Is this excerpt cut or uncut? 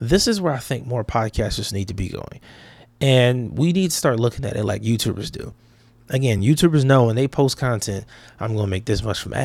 uncut